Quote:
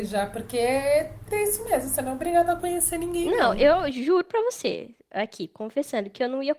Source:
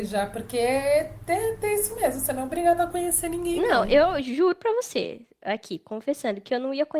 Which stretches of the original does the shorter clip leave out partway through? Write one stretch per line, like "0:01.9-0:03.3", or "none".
0:01.3-0:01.6